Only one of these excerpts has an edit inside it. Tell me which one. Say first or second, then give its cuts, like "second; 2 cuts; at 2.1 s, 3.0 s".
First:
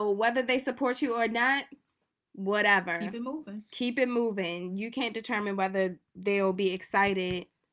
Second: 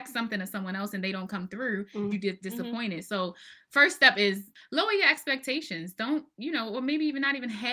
second; 1 cut; at 2.1 s